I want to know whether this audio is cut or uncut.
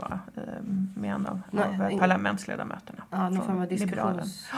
uncut